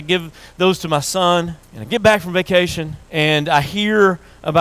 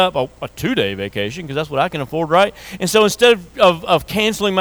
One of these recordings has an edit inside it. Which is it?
first; 2 cuts; at 1.6 s, 3.0 s

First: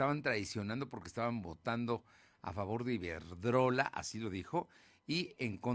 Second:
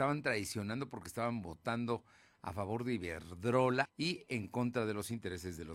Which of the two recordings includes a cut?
second; 1 cut; at 3.8 s

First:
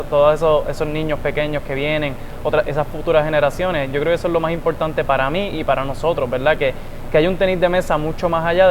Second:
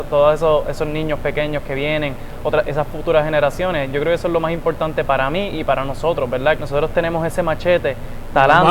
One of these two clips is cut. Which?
second; 1 cut; at 6.6 s

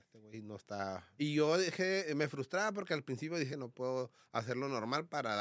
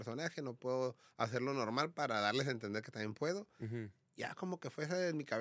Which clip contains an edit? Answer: first; 2 cuts; at 1.2 s, 3.5 s

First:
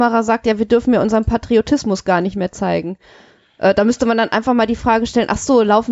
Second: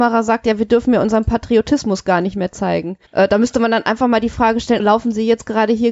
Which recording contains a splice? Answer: second; 2 cuts; at 3.1 s, 4.8 s

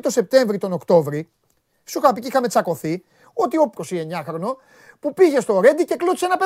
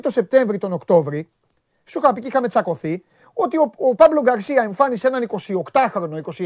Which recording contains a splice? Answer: first; 1 cut; at 3.8 s

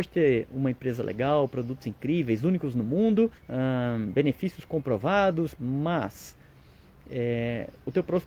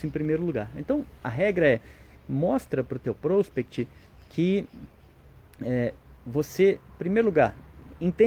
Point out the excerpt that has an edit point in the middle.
first; 2 cuts; at 3.4 s, 5.6 s

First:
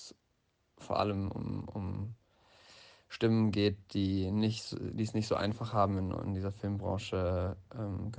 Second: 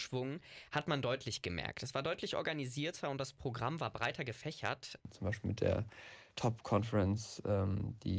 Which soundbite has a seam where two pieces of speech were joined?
second; 2 cuts; at 5.0 s, 6.3 s

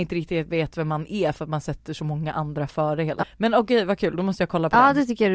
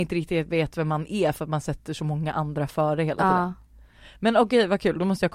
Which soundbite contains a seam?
first; 1 cut; at 3.2 s

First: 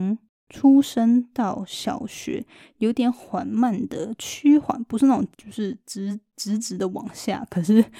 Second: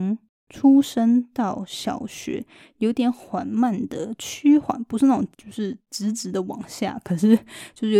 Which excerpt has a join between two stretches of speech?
second; 1 cut; at 5.8 s

